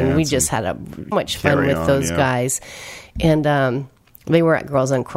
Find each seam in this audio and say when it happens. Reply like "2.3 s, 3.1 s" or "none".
1.1 s